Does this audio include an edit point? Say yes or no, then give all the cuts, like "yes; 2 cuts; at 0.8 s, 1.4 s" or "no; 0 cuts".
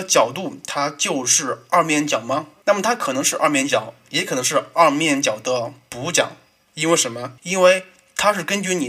yes; 2 cuts; at 2.6 s, 7.4 s